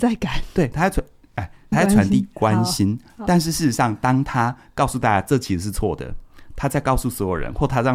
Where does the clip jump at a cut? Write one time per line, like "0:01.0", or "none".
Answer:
0:01.7